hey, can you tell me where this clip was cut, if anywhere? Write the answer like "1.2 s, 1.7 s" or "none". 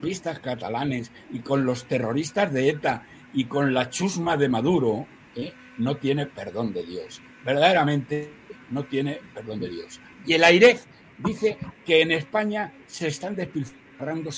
10.2 s